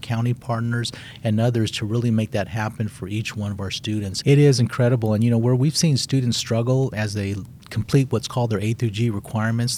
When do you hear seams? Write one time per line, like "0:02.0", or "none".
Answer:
0:04.2
0:06.9